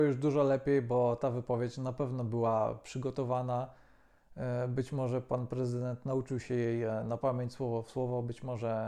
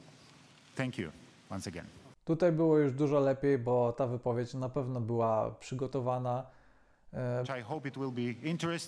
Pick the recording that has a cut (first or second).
second